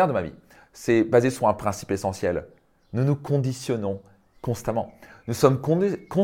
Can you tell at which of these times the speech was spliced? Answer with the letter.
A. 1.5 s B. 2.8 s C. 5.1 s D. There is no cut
D